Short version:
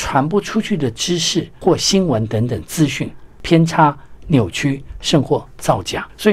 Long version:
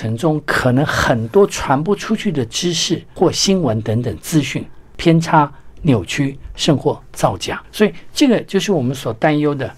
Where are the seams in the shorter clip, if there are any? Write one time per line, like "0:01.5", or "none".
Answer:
none